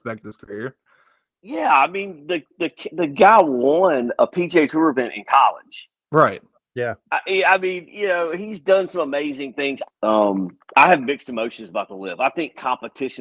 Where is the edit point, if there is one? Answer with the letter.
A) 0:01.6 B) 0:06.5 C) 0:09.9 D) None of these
C